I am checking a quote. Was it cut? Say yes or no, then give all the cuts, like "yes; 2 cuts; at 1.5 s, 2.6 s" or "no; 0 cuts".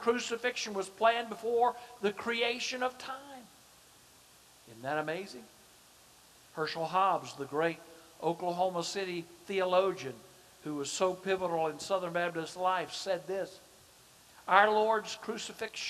no; 0 cuts